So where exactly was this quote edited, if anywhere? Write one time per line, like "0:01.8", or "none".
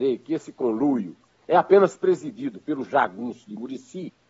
none